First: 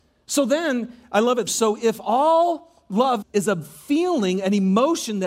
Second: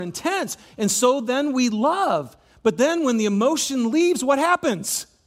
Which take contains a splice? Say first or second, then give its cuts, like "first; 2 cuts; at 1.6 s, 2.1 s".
first; 2 cuts; at 1.5 s, 3.2 s